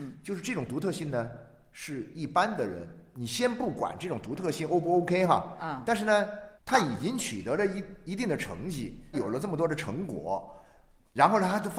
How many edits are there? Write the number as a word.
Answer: two